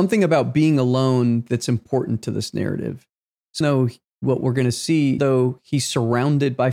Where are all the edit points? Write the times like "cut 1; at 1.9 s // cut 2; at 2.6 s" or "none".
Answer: cut 1; at 3.6 s // cut 2; at 5.2 s